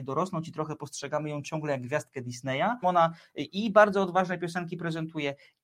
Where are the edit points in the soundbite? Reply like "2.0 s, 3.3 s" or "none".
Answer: 2.8 s